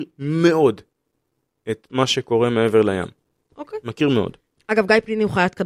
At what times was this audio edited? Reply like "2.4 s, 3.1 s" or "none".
4.5 s